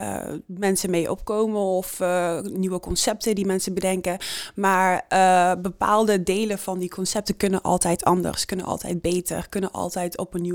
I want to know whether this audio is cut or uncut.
uncut